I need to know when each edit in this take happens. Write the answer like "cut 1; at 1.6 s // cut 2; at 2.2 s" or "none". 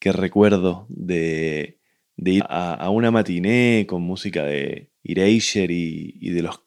cut 1; at 2.4 s // cut 2; at 5.0 s